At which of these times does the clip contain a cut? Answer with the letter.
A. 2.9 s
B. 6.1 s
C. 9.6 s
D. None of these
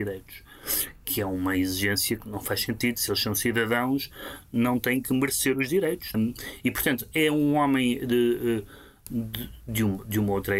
B